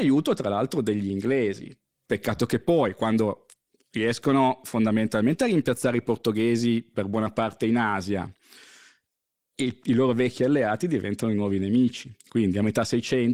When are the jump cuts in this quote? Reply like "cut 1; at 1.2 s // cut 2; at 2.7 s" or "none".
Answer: none